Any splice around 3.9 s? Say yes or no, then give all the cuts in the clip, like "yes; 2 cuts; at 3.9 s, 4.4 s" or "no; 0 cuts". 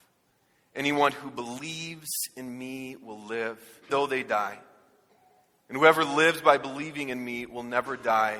yes; 1 cut; at 3.9 s